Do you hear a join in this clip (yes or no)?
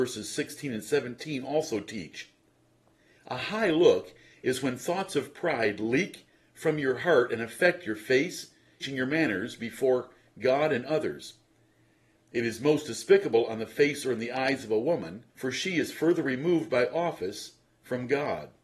yes